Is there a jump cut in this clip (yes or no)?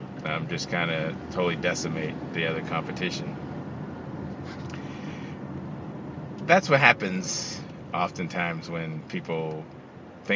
no